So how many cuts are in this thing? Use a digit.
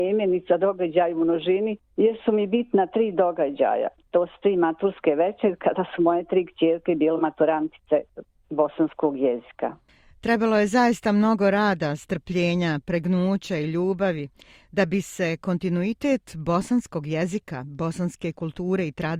0